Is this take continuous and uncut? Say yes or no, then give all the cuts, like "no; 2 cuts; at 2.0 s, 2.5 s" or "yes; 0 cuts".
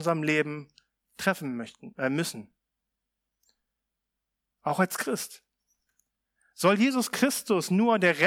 yes; 0 cuts